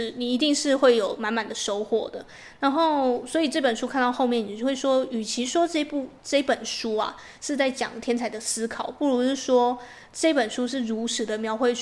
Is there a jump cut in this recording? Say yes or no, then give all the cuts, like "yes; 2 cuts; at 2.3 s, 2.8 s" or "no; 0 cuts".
no; 0 cuts